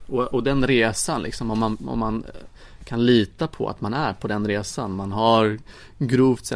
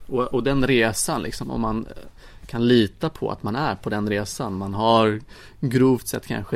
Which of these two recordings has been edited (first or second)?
second